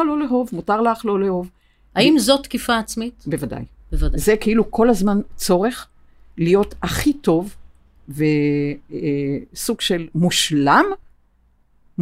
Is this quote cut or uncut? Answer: uncut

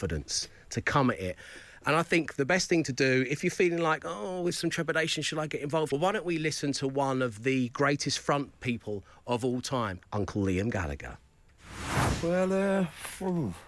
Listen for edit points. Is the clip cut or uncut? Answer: cut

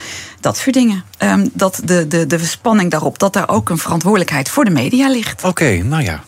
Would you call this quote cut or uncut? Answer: uncut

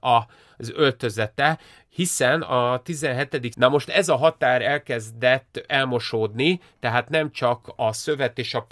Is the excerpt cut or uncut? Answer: cut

